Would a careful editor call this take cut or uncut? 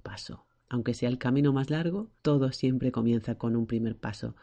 cut